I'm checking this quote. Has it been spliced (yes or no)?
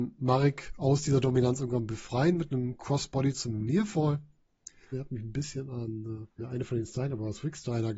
yes